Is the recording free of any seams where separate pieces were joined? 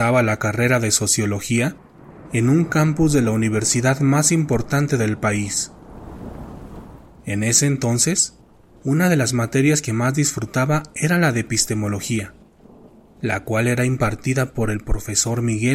yes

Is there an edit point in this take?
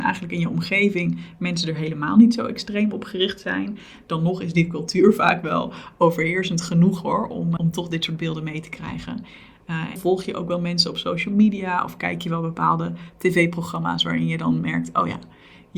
yes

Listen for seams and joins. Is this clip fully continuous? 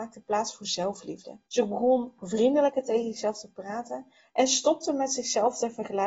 no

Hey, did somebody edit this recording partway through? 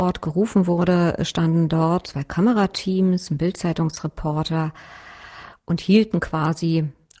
yes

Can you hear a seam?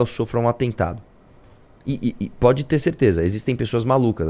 no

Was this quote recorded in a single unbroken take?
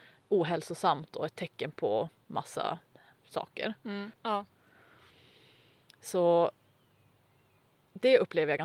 no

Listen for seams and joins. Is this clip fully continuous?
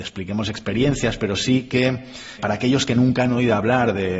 no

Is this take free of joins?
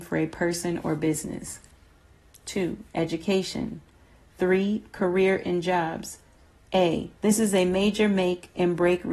no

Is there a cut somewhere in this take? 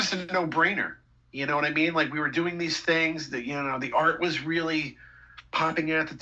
no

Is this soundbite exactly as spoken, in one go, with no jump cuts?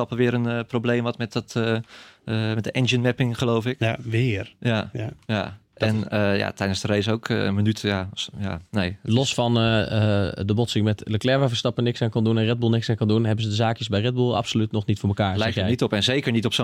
yes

